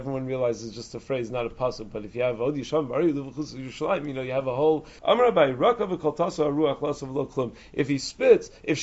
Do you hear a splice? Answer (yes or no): yes